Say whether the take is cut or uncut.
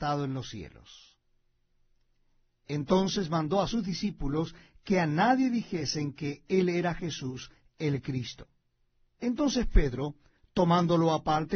cut